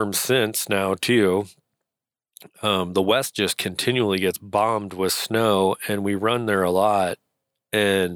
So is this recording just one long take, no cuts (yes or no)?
yes